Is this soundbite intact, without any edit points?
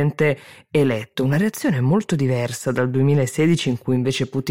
yes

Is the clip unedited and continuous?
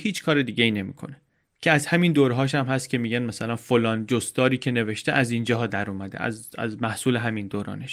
yes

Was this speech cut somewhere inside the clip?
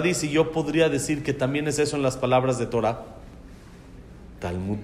no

